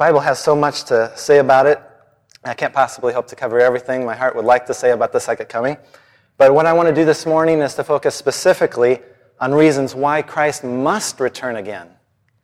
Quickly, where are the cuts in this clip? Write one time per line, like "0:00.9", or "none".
none

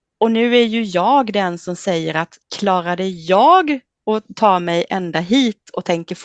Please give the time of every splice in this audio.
0:02.4

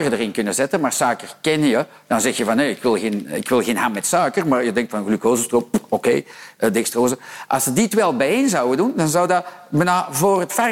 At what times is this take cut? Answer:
none

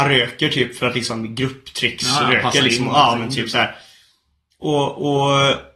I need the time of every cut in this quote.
none

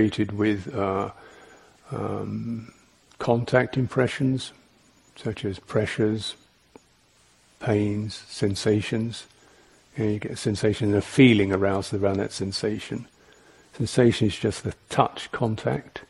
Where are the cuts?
none

